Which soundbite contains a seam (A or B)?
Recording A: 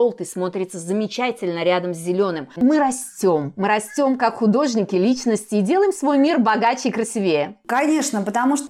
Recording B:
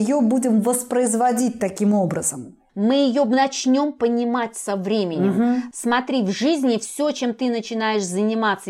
A